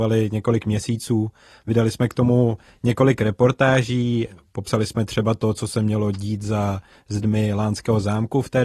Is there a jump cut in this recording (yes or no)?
no